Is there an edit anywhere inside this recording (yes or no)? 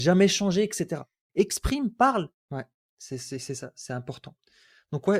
yes